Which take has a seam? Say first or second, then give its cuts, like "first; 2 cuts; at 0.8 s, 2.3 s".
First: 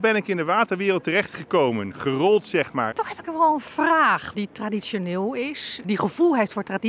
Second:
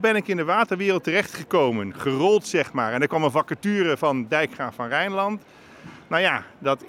first; 3 cuts; at 2.9 s, 4.3 s, 5.8 s